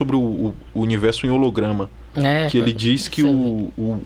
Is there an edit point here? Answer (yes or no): no